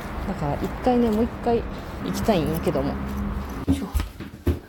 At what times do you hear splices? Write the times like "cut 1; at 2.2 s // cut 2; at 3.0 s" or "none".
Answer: cut 1; at 2.0 s